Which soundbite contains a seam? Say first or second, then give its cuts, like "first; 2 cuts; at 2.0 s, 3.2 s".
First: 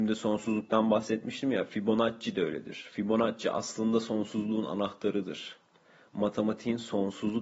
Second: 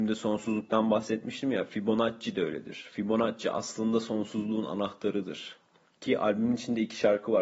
second; 1 cut; at 5.8 s